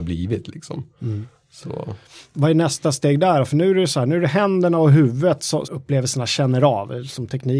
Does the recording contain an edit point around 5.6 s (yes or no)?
yes